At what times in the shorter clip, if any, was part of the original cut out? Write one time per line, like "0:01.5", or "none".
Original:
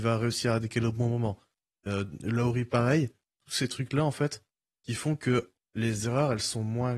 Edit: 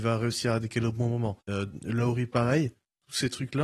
0:01.4